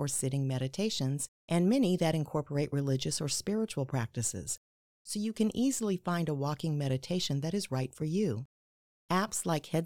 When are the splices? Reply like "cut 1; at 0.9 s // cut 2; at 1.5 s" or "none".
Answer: cut 1; at 8.9 s